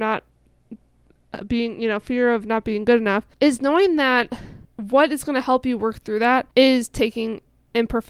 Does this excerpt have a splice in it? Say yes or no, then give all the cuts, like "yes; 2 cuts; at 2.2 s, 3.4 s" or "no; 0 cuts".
yes; 3 cuts; at 3.3 s, 4.6 s, 6.5 s